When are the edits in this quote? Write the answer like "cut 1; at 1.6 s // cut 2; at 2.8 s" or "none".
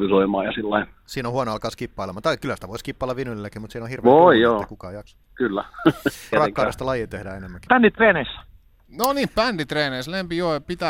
cut 1; at 6.3 s // cut 2; at 7.7 s

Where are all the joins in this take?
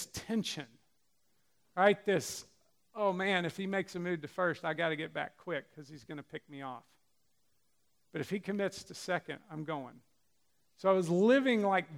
none

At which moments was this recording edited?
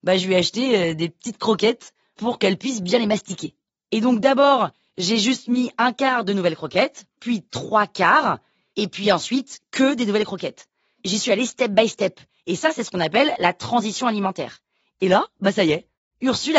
cut 1; at 7.2 s

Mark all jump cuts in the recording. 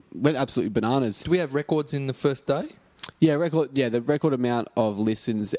cut 1; at 1.2 s

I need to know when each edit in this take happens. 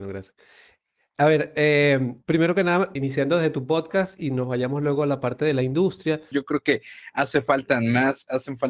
cut 1; at 3.0 s // cut 2; at 6.3 s

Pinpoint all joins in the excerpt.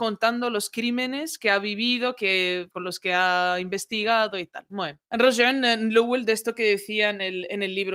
cut 1; at 5.0 s

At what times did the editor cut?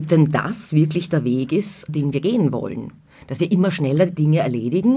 cut 1; at 1.9 s

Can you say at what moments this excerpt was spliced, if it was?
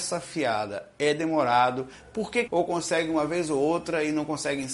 cut 1; at 2.5 s

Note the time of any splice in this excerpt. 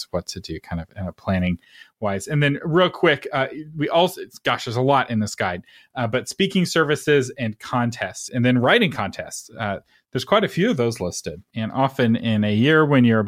cut 1; at 8.3 s // cut 2; at 11.5 s

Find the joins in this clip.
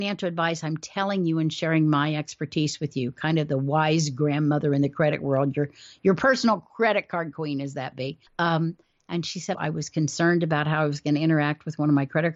cut 1; at 8.3 s // cut 2; at 9.5 s

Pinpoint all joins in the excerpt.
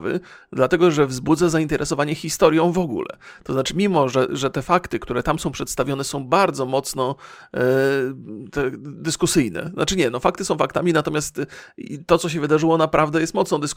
none

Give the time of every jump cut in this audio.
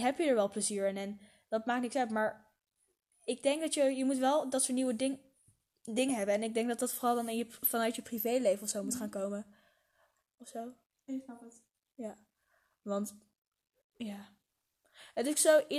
none

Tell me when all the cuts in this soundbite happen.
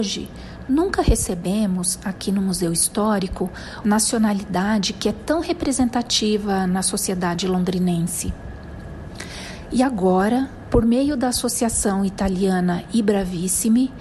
cut 1; at 3.8 s

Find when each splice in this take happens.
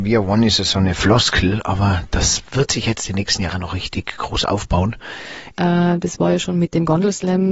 cut 1; at 5.5 s

